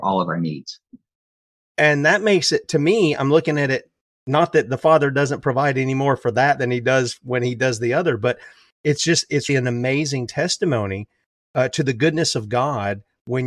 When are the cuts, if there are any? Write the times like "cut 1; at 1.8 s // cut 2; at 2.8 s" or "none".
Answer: cut 1; at 1.6 s // cut 2; at 9.5 s